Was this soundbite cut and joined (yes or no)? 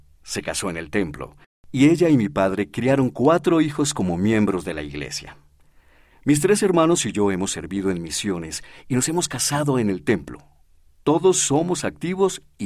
no